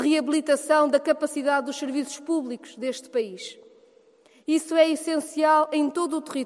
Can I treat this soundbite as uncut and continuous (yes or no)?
yes